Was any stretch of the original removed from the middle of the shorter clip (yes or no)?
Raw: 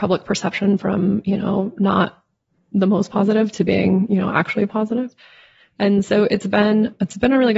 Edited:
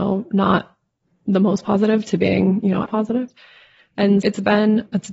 yes